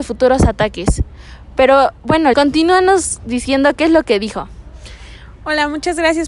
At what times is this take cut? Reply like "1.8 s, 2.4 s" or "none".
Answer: 2.3 s